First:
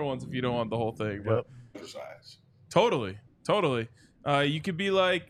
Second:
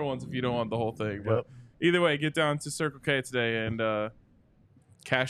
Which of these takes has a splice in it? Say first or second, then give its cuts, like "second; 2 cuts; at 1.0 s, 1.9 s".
first; 1 cut; at 1.7 s